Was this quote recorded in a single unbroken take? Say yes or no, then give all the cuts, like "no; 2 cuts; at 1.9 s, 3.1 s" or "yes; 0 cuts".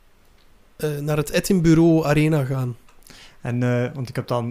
yes; 0 cuts